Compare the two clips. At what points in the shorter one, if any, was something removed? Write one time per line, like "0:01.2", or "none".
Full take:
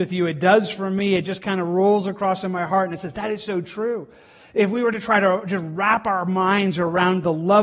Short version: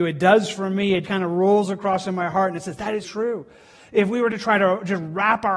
0:01.0
0:03.0